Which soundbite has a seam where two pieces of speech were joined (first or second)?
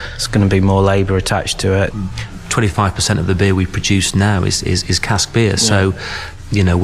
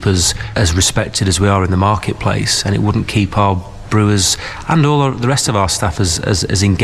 first